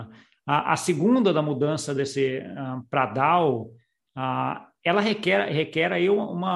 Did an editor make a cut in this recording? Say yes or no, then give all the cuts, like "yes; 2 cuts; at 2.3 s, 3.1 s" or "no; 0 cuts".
no; 0 cuts